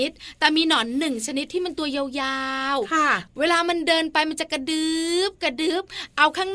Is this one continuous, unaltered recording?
yes; 0 cuts

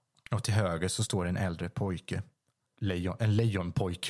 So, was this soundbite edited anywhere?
no; 0 cuts

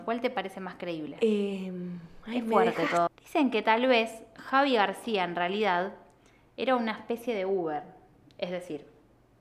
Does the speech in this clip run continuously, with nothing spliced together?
no; 1 cut; at 3.1 s

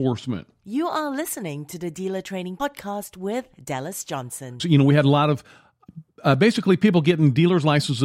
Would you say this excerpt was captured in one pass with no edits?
no; 1 cut; at 4.6 s

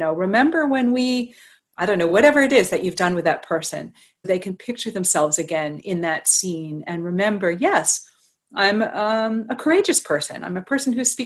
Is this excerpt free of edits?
yes; 0 cuts

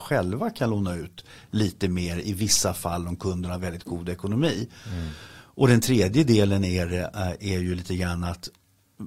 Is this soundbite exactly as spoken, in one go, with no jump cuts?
yes; 0 cuts

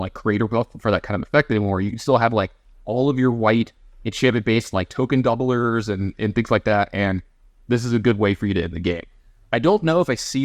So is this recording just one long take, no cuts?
yes; 0 cuts

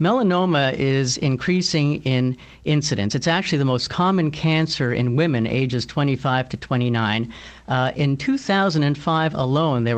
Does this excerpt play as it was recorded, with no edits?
yes; 0 cuts

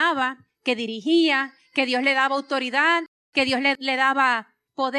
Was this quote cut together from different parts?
no; 0 cuts

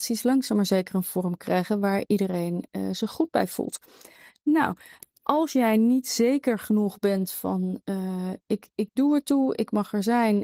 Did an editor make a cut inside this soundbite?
no; 0 cuts

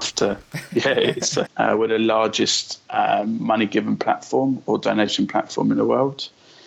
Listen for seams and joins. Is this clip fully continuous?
no; 1 cut; at 1.5 s

